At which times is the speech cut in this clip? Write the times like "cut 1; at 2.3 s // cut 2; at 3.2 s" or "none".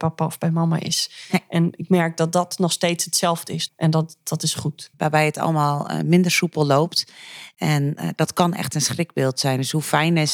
cut 1; at 3.7 s // cut 2; at 4.9 s